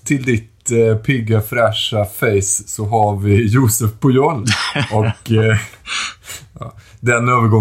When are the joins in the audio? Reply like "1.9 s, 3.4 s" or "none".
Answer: none